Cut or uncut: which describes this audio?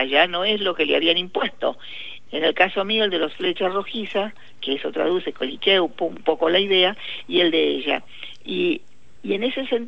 cut